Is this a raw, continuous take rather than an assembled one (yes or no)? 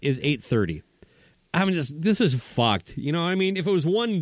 yes